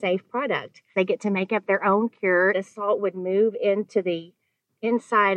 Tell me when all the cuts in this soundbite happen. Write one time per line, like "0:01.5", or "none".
0:00.9
0:02.5